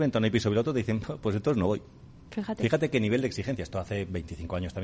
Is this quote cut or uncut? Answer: uncut